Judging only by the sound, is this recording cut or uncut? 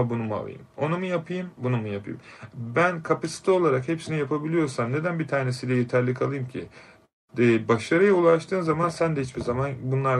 uncut